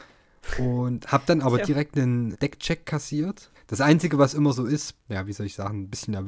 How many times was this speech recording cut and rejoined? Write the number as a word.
three